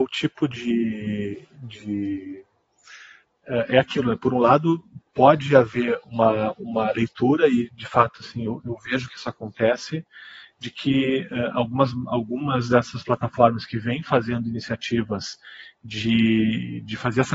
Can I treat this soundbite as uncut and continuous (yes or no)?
yes